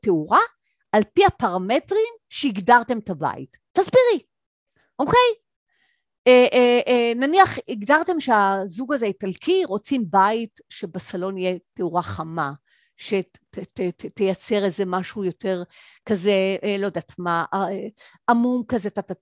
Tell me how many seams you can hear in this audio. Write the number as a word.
zero